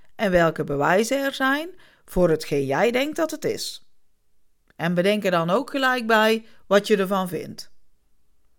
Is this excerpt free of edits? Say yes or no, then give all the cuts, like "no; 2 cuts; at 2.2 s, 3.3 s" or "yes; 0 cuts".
yes; 0 cuts